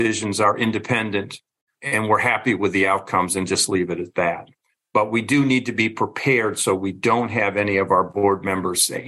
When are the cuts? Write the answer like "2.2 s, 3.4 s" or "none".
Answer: none